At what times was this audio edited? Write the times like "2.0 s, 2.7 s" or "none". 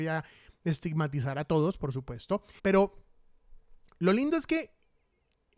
2.6 s